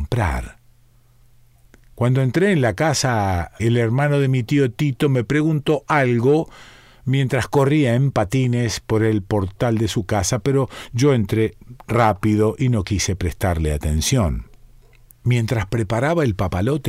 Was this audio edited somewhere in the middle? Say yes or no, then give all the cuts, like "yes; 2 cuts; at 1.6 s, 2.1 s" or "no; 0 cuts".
yes; 1 cut; at 3.6 s